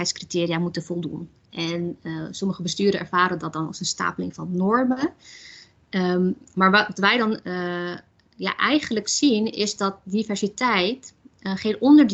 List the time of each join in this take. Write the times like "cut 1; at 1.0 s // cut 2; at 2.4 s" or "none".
cut 1; at 1.4 s